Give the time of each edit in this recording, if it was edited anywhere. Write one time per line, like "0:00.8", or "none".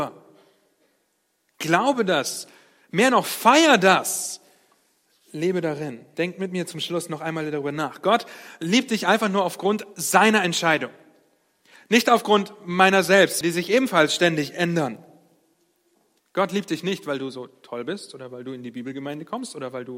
0:06.1
0:13.4
0:16.2